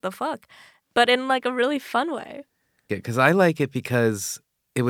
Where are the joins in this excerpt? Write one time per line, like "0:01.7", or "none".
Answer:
0:02.9